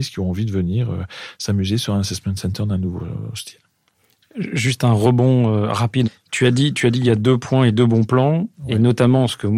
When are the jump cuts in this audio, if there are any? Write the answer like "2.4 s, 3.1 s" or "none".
none